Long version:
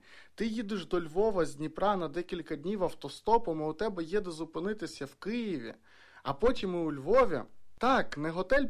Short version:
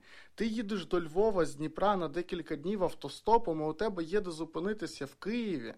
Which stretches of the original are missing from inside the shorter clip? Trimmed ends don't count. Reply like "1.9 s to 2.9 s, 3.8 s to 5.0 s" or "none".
none